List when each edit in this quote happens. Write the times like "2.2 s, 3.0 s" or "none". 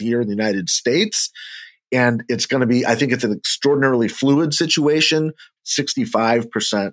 5.6 s